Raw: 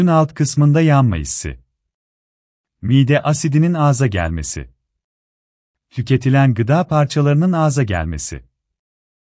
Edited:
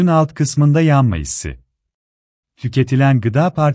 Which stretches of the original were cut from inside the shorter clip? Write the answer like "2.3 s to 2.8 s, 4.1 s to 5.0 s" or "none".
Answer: 2.4 s to 5.8 s